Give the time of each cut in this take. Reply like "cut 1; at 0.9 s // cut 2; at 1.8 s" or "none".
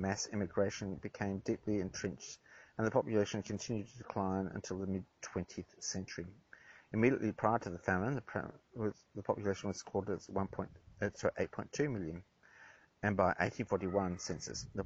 cut 1; at 9.1 s